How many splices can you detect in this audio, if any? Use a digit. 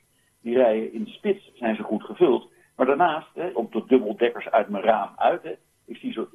1